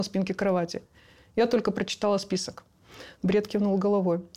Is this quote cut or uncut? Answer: cut